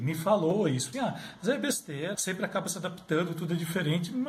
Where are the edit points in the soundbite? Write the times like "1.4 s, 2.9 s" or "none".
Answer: 0.9 s, 2.1 s